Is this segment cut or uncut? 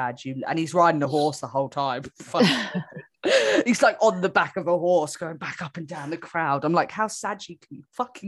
uncut